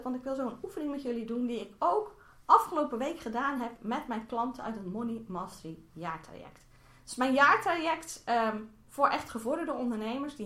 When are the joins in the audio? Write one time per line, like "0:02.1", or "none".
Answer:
none